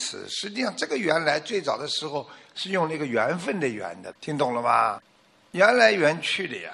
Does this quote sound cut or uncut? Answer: cut